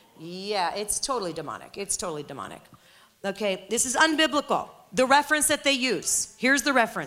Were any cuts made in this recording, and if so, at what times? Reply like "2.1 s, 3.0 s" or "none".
none